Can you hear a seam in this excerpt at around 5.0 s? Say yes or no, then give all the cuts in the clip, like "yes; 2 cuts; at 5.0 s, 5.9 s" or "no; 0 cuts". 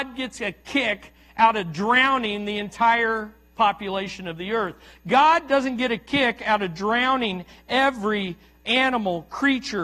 no; 0 cuts